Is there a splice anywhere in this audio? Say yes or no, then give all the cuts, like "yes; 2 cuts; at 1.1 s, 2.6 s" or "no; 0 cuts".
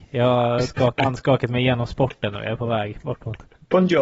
yes; 1 cut; at 1.0 s